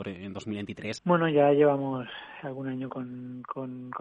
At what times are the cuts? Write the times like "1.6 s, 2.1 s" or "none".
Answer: 1.0 s, 2.9 s